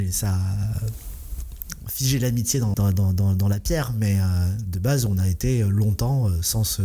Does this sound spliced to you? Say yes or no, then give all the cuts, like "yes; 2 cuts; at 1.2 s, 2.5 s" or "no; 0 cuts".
yes; 1 cut; at 2.7 s